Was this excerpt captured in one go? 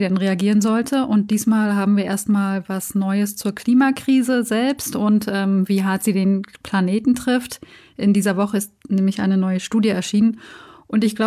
yes; 0 cuts

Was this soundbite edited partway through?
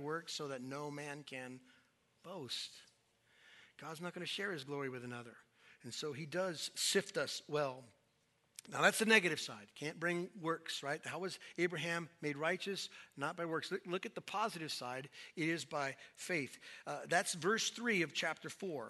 no; 0 cuts

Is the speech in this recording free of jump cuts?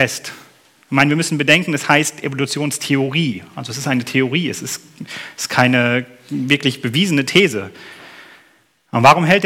yes; 0 cuts

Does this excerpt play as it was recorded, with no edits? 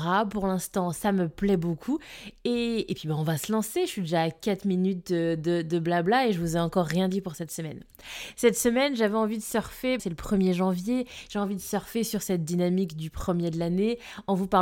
no; 1 cut; at 10.0 s

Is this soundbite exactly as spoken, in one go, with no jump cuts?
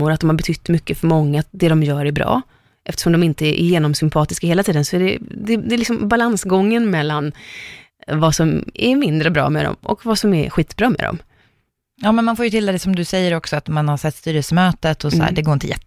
yes; 0 cuts

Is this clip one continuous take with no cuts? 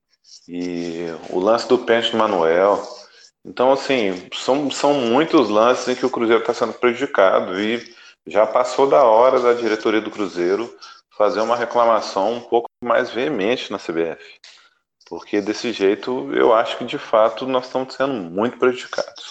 yes; 0 cuts

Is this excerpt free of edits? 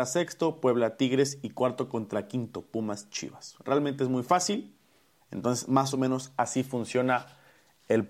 no; 1 cut; at 5.2 s

